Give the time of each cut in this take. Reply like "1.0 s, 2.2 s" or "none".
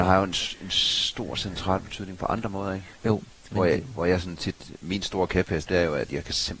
5.7 s